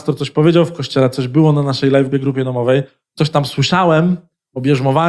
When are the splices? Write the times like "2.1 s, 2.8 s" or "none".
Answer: 2.1 s